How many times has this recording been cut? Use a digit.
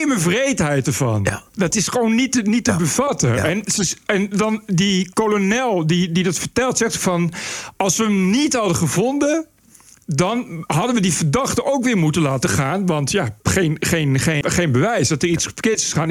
2